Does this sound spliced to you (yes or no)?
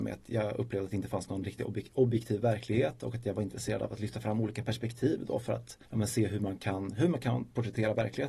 yes